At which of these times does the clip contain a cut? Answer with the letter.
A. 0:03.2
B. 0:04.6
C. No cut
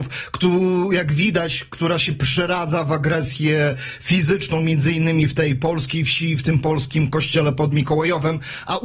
C